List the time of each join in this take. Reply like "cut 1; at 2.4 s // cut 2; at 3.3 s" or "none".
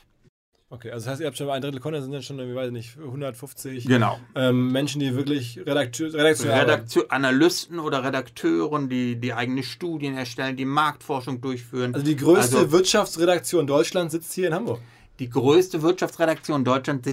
none